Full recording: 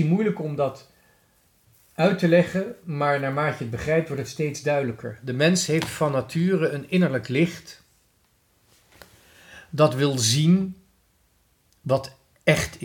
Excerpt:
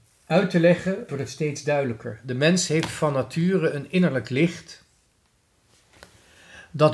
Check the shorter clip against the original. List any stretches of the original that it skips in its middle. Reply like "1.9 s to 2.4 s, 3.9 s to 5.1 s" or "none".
2.8 s to 4.1 s